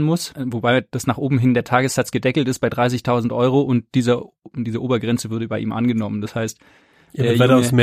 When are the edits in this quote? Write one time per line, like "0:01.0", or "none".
none